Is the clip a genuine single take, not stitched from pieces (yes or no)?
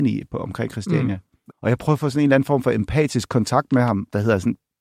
no